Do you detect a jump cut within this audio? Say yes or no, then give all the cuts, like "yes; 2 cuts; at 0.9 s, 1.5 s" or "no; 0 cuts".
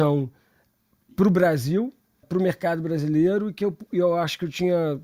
yes; 1 cut; at 2.2 s